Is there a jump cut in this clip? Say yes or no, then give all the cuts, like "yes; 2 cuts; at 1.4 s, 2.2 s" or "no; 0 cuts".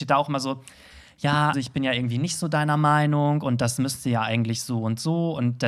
yes; 1 cut; at 1.5 s